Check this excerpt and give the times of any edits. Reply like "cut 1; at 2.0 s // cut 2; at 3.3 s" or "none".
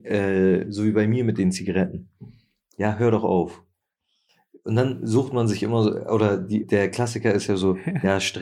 cut 1; at 2.7 s // cut 2; at 6.6 s